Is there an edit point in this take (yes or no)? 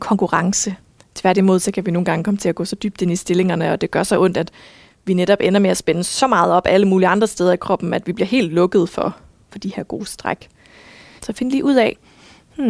yes